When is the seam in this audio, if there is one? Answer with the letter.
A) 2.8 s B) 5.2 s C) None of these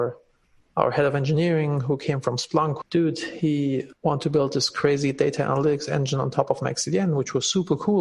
A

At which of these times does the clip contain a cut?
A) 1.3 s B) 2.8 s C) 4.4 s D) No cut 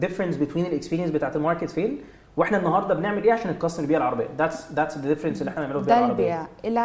D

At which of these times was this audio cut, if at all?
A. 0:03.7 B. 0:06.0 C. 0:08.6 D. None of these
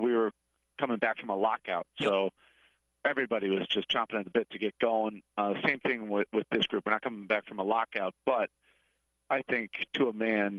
D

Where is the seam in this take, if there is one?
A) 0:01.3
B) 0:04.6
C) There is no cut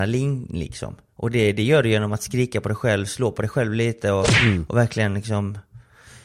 C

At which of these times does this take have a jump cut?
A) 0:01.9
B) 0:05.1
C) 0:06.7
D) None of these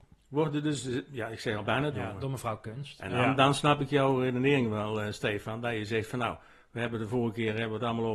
A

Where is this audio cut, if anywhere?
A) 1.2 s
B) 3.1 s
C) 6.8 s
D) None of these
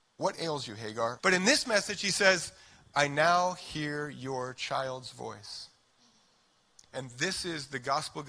A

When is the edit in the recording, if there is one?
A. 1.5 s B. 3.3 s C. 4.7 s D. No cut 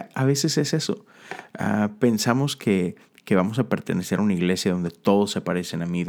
D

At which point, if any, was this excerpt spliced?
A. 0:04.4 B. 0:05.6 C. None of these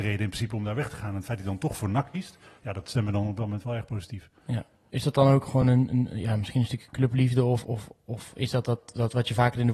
C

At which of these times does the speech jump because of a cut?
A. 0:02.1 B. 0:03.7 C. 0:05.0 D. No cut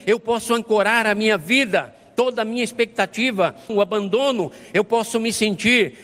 B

